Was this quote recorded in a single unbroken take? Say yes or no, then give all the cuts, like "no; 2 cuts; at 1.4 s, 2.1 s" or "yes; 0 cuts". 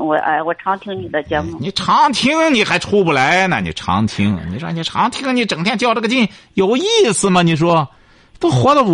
yes; 0 cuts